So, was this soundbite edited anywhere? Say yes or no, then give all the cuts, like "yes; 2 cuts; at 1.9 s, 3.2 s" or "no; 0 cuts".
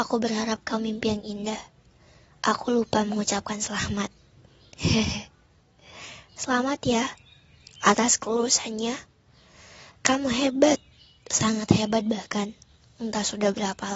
no; 0 cuts